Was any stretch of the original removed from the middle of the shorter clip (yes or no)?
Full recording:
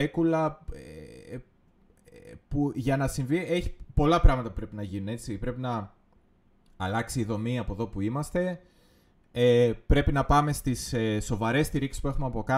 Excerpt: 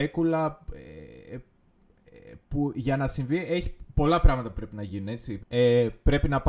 yes